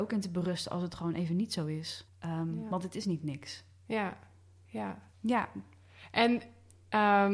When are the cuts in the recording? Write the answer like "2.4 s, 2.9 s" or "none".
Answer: 2.1 s, 5.1 s